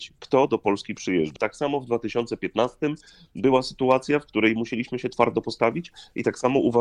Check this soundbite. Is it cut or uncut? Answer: cut